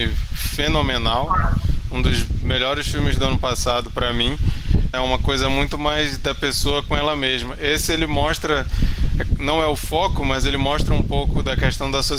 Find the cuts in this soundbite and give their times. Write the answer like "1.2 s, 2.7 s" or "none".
4.9 s